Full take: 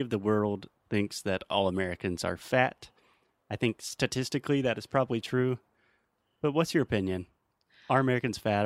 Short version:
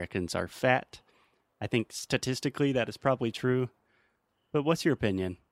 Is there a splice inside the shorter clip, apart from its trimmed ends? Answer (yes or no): no